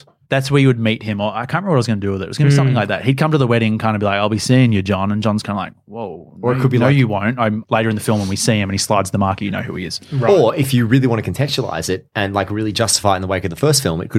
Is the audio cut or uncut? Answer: cut